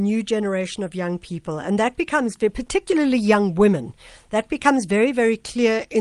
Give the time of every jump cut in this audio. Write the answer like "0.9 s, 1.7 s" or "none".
none